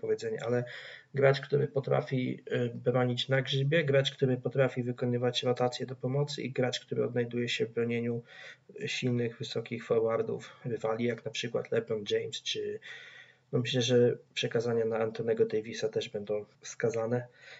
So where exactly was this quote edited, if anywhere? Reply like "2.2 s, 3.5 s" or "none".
16.5 s